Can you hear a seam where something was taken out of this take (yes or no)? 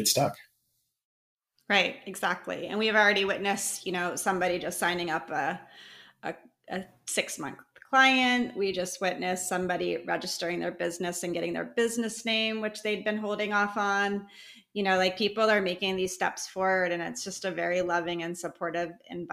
no